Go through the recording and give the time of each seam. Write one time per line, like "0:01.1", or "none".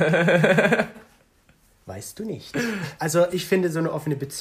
0:00.9
0:03.0